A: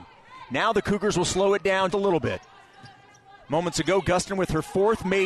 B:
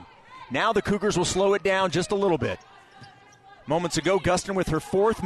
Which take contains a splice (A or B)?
A